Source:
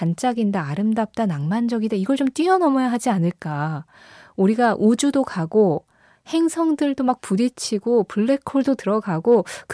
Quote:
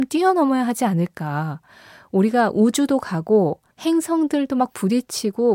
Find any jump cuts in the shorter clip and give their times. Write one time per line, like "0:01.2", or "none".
0:03.7